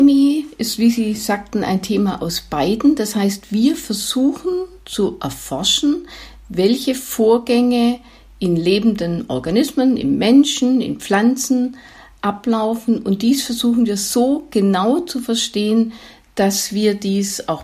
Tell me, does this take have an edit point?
no; 0 cuts

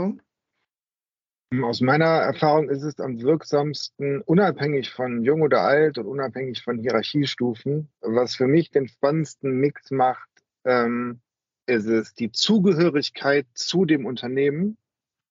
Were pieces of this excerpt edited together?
no; 0 cuts

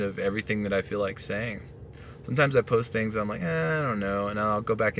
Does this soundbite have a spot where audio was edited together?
no; 0 cuts

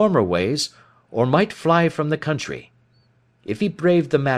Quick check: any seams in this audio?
no; 0 cuts

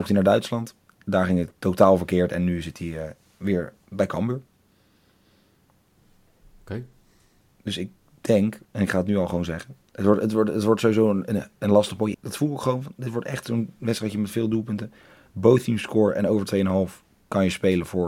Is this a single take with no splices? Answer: no; 2 cuts; at 8.6 s, 12.1 s

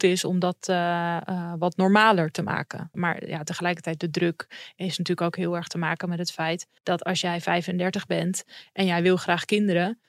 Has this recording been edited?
yes; 2 cuts; at 2.9 s, 6.8 s

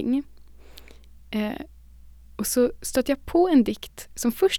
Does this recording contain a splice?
no; 0 cuts

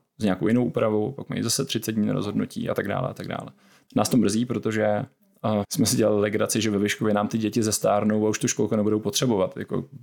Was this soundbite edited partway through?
yes; 2 cuts; at 3.8 s, 5.6 s

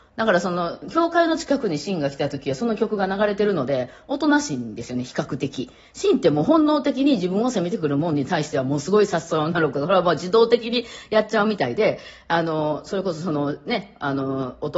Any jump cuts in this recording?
no; 0 cuts

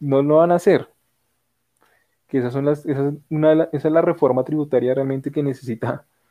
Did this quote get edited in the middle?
no; 0 cuts

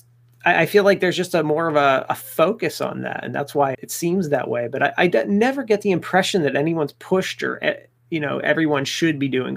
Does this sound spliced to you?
yes; 1 cut; at 3.7 s

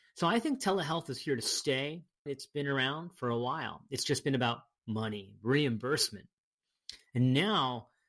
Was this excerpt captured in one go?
no; 1 cut; at 2.3 s

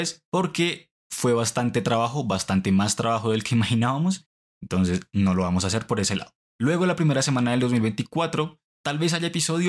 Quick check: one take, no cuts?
yes; 0 cuts

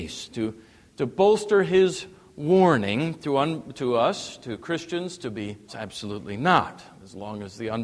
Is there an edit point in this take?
yes; 1 cut; at 5.7 s

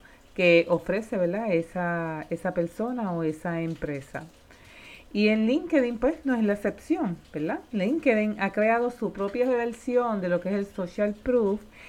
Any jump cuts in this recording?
no; 0 cuts

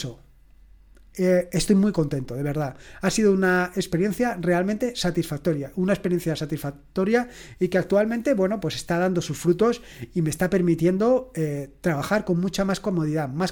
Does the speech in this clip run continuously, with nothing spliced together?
yes; 0 cuts

